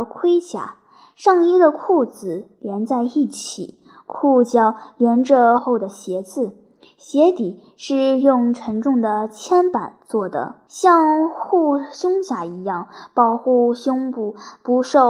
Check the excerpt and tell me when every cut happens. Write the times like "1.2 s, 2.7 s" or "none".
5.6 s, 10.7 s